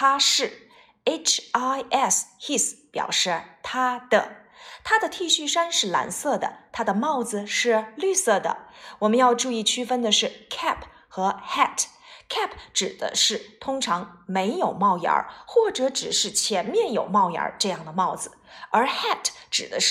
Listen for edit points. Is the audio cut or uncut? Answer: uncut